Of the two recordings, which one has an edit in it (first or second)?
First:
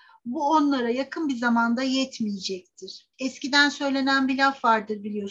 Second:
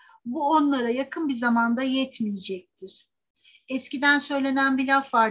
first